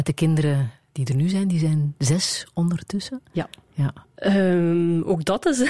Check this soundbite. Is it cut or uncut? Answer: cut